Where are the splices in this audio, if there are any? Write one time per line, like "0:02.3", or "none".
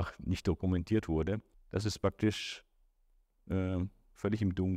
0:01.5